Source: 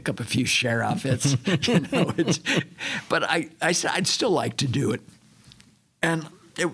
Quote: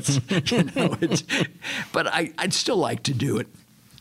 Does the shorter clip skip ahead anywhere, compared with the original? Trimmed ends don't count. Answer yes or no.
yes